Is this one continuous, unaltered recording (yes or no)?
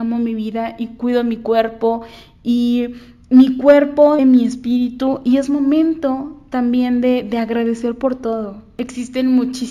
no